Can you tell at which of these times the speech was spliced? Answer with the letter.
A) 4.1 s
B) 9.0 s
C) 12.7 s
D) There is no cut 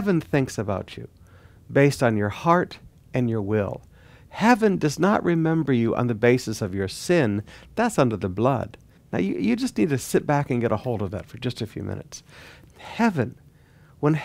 B